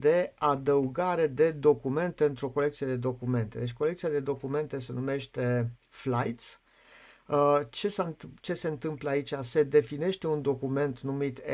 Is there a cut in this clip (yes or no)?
no